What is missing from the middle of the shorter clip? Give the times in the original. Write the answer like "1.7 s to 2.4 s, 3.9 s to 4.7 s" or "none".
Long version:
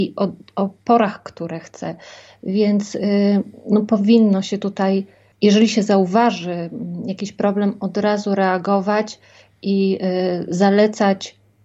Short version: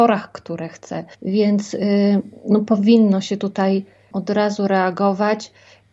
2.1 s to 2.4 s, 5.3 s to 7.8 s